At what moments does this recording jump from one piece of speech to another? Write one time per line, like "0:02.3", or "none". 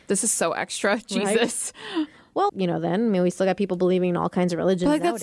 0:02.5